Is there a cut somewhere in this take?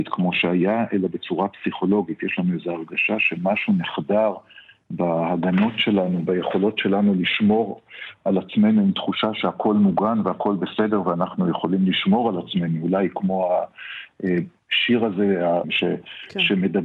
yes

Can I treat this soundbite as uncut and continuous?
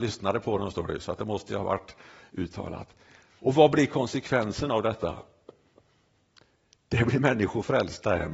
no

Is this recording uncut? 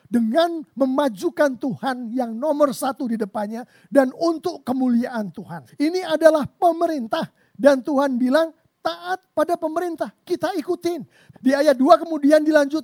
no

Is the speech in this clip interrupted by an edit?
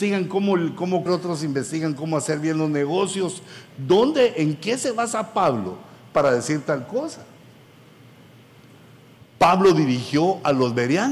yes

